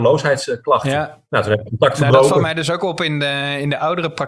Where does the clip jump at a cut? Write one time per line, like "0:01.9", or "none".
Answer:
none